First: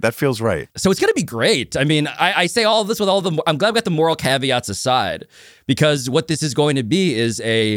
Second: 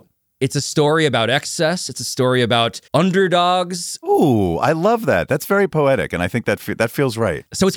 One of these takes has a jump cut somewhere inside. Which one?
second; 2 cuts; at 2.9 s, 4.0 s

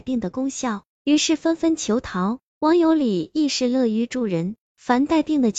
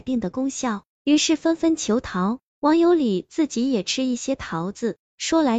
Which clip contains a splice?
second; 1 cut; at 2.5 s

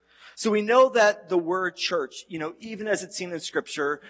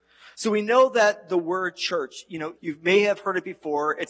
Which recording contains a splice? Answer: second; 1 cut; at 2.6 s

